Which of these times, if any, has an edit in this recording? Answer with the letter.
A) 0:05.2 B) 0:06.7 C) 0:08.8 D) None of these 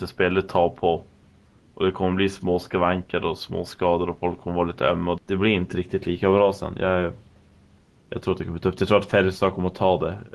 A